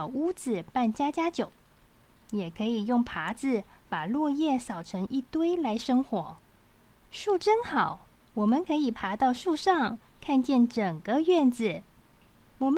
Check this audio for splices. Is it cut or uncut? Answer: cut